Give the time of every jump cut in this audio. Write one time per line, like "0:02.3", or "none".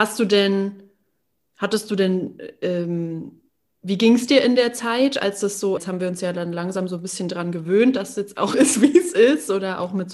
0:05.8
0:08.5